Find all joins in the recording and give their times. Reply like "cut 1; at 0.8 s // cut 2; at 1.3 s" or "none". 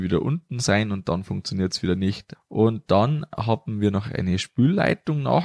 cut 1; at 2.3 s